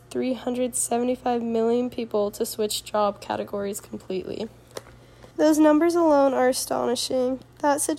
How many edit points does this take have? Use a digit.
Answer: 1